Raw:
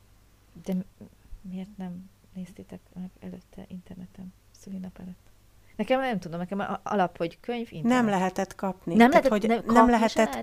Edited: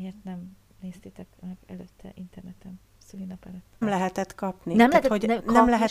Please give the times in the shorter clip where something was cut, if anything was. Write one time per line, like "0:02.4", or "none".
0:03.8

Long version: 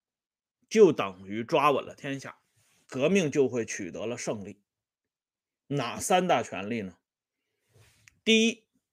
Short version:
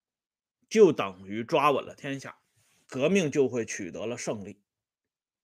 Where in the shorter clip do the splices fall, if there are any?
none

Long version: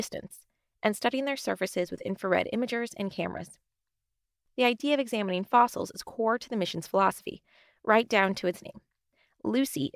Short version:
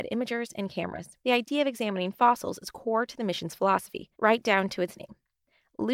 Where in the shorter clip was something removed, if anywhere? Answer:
0:01.2
0:04.1

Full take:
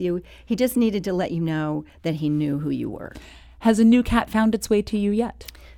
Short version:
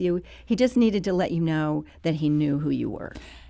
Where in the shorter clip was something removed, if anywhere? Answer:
none

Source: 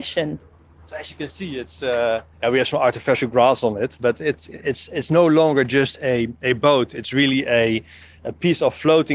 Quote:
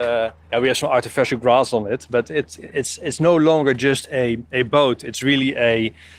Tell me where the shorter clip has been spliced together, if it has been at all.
none

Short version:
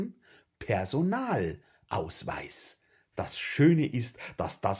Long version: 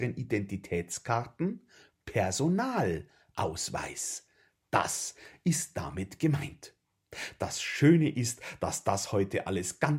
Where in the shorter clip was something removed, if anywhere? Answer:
0:03.1

